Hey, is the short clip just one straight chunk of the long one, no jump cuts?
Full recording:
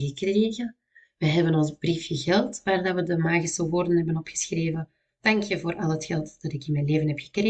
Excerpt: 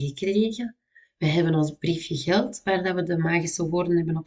yes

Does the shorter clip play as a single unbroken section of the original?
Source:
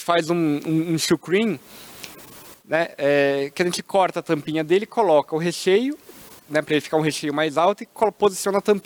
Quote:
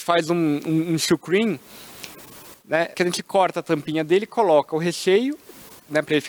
no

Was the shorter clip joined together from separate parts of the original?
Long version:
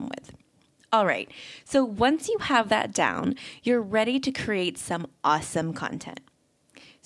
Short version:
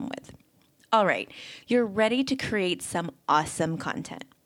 yes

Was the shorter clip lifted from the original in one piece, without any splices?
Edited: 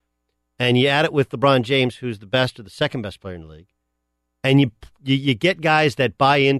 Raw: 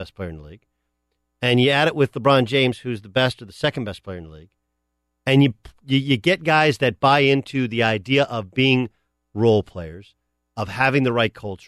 yes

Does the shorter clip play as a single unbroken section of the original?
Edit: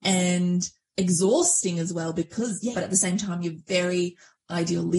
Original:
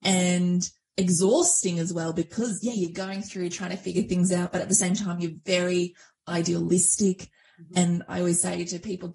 no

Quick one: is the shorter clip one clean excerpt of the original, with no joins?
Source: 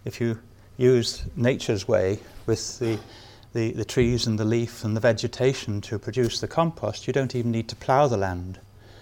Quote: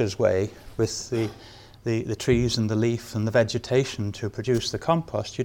yes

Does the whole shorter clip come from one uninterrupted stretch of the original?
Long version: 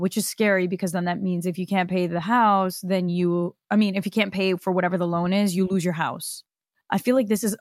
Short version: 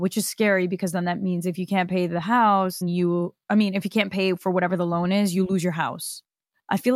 no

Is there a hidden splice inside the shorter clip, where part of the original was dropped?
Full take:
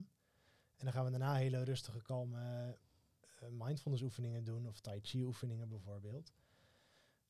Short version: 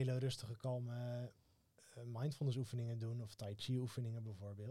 no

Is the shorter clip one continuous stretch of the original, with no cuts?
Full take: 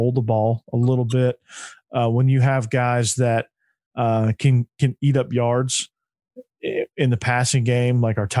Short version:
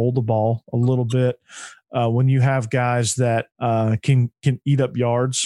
no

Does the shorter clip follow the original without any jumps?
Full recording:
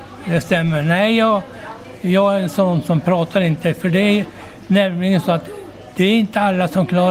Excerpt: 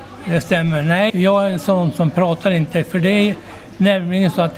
no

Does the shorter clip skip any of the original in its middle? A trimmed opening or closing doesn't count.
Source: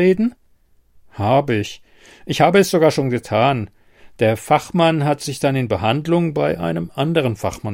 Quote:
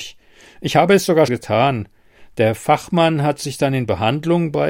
yes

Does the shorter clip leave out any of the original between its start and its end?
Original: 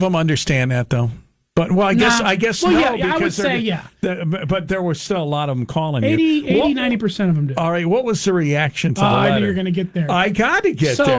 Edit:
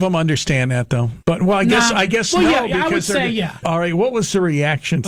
yes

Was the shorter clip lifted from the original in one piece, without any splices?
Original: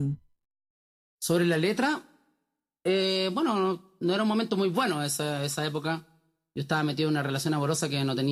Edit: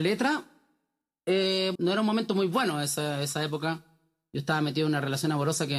no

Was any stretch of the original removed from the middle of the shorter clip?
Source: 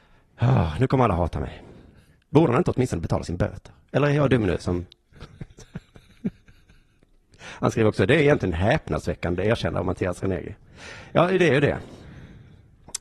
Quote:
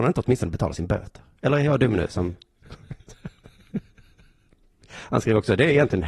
no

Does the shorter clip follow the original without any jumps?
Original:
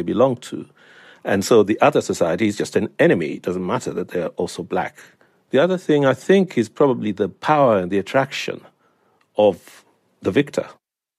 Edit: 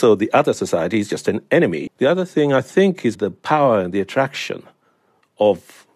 no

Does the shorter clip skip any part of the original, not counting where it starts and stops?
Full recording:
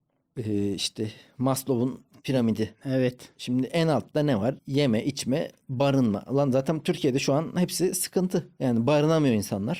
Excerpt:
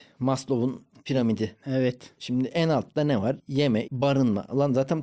yes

